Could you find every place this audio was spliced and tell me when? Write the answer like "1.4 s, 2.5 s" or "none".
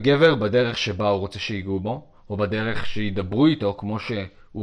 none